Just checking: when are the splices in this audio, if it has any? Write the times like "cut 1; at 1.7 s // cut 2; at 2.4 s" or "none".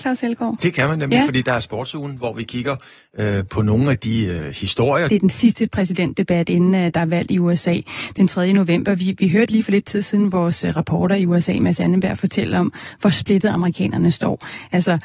cut 1; at 5.1 s